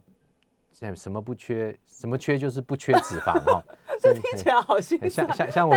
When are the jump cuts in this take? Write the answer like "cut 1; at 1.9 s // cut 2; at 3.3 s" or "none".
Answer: none